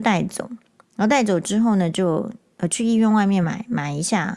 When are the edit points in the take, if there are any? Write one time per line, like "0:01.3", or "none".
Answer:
none